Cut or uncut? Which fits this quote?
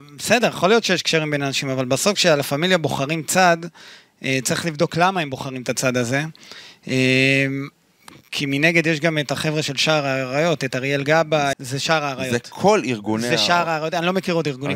cut